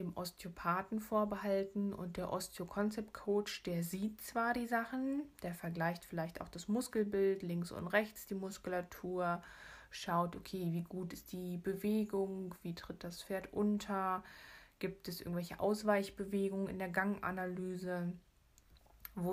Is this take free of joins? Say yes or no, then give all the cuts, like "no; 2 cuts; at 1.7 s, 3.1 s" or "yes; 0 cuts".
yes; 0 cuts